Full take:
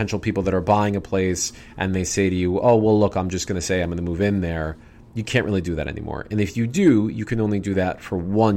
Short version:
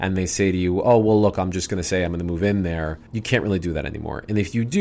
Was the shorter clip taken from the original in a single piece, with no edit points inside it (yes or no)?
no